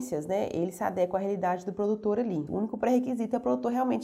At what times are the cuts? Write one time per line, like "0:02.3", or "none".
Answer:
0:02.5